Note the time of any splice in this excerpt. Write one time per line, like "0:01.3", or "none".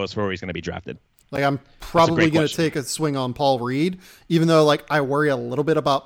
0:01.2